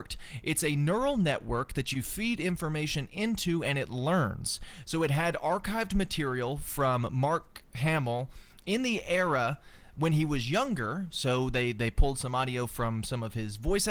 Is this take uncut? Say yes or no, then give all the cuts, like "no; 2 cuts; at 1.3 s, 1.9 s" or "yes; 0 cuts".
yes; 0 cuts